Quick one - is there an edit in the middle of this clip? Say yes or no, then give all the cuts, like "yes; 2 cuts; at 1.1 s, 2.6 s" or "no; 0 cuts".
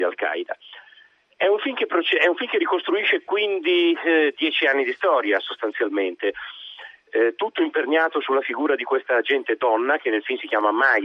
no; 0 cuts